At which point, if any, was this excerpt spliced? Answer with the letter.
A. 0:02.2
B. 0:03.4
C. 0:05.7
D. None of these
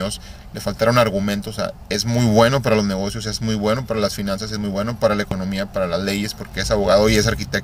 D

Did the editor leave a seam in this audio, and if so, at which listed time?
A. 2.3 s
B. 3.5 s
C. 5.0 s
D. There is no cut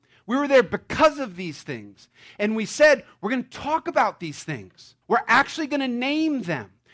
C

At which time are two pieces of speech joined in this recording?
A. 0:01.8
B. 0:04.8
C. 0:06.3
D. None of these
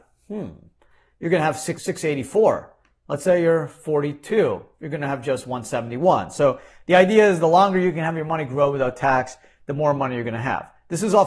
A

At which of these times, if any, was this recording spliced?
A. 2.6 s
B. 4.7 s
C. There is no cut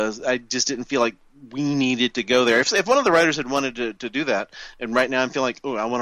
C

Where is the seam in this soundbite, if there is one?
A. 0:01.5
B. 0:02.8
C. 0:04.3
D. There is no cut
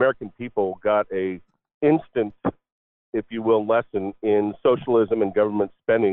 D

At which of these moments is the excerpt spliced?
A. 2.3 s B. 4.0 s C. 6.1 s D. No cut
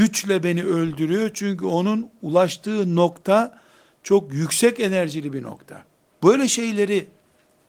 C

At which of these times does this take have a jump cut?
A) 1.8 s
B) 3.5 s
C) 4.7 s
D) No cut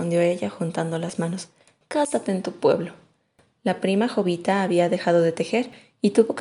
A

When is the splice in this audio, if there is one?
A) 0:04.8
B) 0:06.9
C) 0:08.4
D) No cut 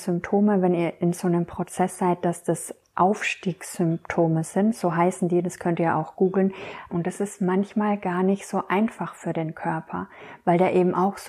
B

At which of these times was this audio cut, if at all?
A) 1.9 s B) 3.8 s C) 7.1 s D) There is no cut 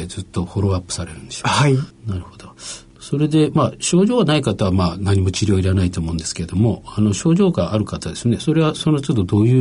A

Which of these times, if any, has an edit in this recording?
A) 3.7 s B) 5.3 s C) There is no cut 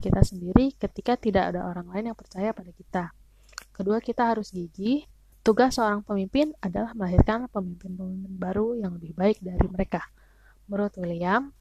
B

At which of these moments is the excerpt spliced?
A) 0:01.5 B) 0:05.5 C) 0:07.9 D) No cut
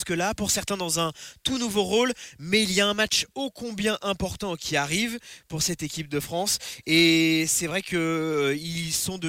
D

